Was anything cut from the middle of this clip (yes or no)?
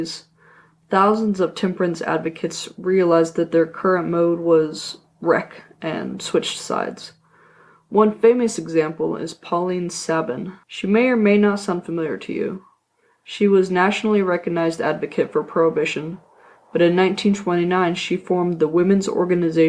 yes